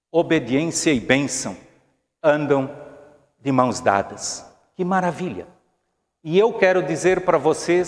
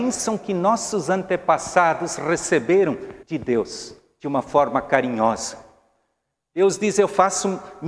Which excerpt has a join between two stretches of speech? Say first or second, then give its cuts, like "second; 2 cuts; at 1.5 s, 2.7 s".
second; 1 cut; at 3.2 s